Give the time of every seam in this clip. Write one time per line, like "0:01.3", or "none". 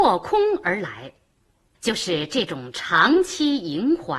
0:01.7